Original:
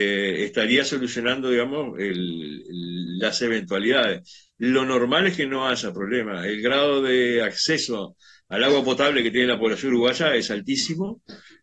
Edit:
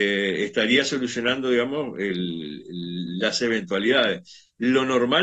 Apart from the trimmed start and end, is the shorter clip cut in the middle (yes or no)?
no